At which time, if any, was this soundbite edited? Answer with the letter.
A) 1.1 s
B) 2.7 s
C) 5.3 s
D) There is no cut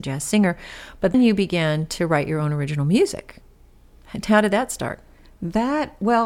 A